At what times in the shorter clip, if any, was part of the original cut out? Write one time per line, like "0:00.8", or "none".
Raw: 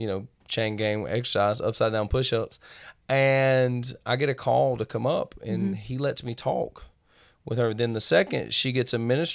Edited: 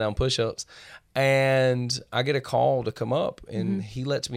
none